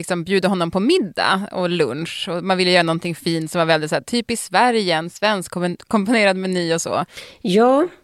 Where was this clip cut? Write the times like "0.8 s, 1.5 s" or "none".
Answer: none